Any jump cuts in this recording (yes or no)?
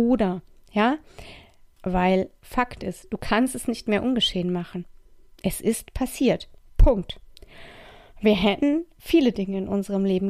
yes